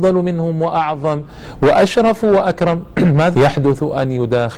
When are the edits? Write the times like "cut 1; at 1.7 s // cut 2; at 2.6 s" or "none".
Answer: cut 1; at 3.3 s

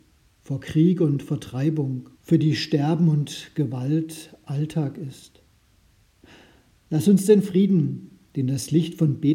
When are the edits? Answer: cut 1; at 2.1 s

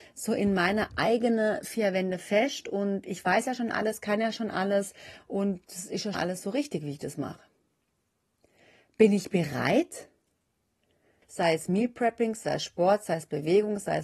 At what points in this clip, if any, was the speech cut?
cut 1; at 6.1 s // cut 2; at 11.2 s

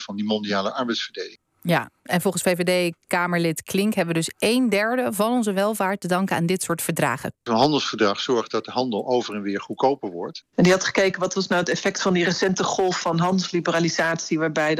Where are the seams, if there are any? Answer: cut 1; at 7.3 s // cut 2; at 10.4 s

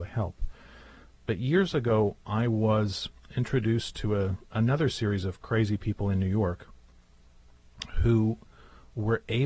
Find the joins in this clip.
none

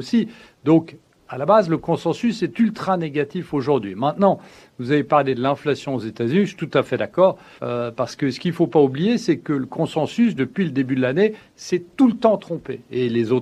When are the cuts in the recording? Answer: cut 1; at 7.6 s

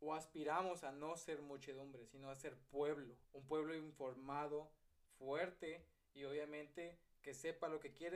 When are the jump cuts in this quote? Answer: cut 1; at 3.2 s

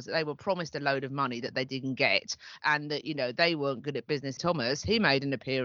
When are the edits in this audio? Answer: cut 1; at 2.6 s // cut 2; at 4.4 s

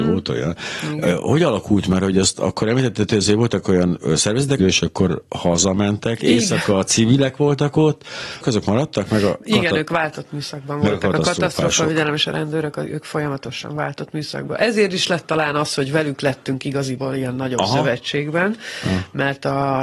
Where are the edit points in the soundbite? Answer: cut 1; at 4.6 s // cut 2; at 8.4 s

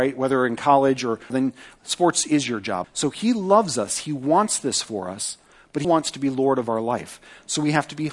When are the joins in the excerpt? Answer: cut 1; at 1.3 s // cut 2; at 2.8 s // cut 3; at 5.8 s

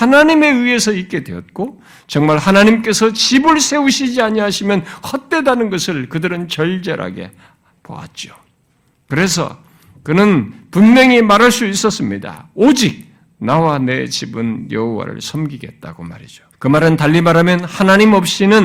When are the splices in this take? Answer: cut 1; at 16.5 s

